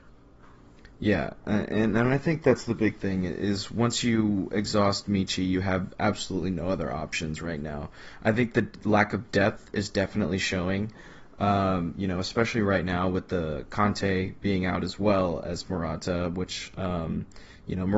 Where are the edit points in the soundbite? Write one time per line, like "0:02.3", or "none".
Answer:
none